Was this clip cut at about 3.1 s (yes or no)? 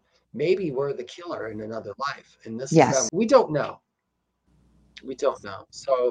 yes